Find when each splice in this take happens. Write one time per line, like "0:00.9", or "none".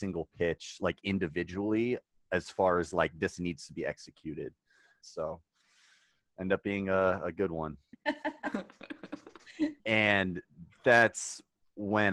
0:05.0
0:07.9
0:09.8